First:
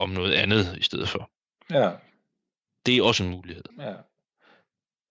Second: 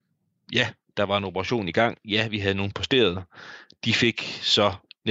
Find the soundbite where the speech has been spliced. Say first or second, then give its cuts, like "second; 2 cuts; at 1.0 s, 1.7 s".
first; 1 cut; at 3.7 s